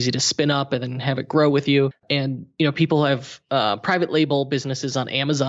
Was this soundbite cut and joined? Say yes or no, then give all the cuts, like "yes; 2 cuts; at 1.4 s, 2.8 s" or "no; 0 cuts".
no; 0 cuts